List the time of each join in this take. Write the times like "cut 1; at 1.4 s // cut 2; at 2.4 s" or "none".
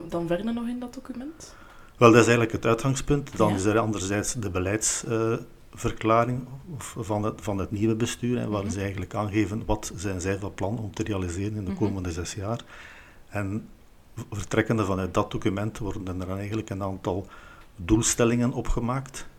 none

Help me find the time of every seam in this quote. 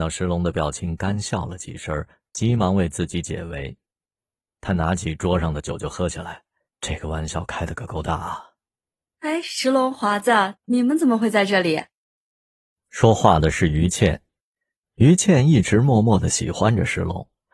cut 1; at 6.7 s

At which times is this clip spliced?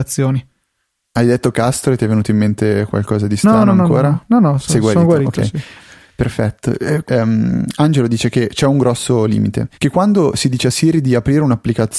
cut 1; at 7.0 s // cut 2; at 9.7 s

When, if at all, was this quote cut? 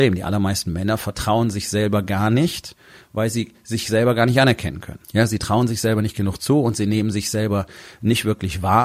cut 1; at 5.0 s

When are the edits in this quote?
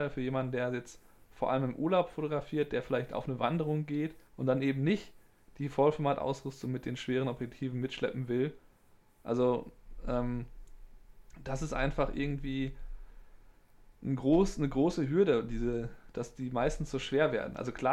cut 1; at 4.3 s

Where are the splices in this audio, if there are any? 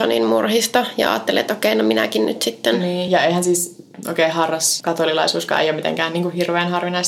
none

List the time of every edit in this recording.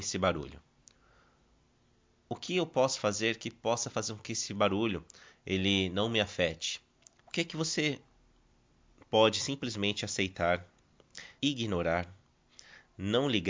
cut 1; at 7.2 s // cut 2; at 11.4 s

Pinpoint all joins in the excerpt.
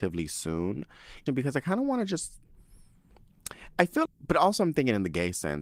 cut 1; at 1.3 s // cut 2; at 4.1 s

